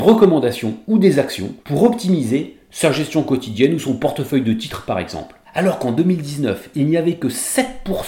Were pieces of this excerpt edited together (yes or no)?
no